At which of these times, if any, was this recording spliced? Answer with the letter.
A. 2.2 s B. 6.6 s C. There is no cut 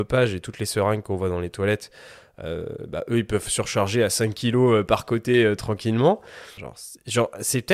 B